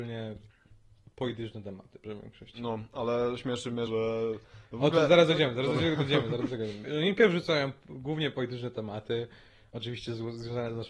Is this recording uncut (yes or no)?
no